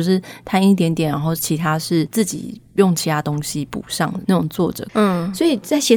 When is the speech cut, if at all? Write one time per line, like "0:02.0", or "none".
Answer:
0:04.9